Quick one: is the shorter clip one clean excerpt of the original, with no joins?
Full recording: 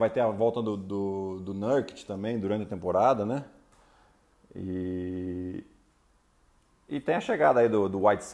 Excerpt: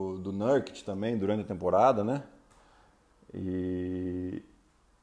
yes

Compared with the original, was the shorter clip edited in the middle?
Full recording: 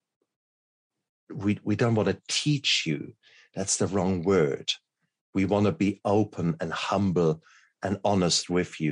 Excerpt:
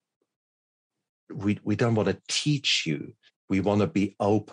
yes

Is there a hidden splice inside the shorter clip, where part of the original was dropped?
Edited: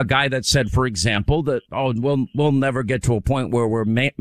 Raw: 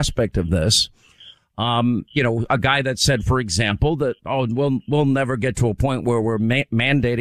no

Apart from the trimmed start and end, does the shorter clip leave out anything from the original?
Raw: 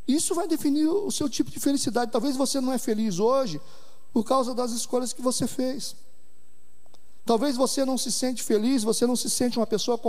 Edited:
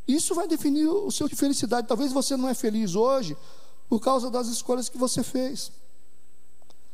yes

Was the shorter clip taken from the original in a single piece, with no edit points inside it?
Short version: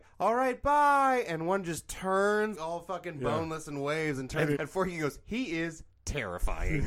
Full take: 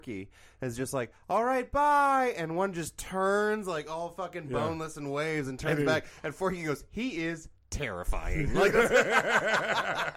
no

